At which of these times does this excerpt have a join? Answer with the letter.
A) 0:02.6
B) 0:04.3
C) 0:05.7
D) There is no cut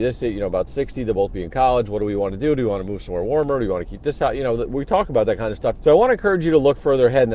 C